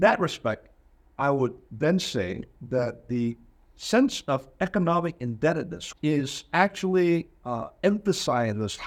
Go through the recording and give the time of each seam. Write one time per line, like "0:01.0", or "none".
0:05.9